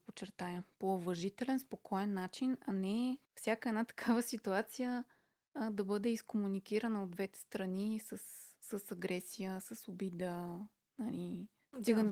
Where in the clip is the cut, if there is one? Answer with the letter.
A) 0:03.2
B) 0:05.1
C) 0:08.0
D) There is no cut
A